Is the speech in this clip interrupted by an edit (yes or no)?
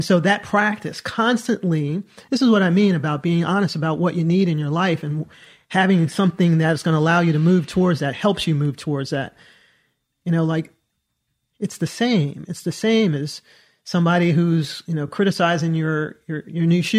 no